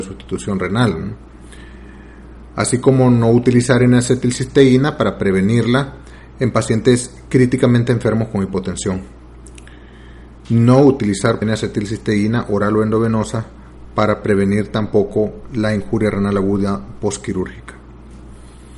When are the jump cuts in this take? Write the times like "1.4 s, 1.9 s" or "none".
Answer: 11.4 s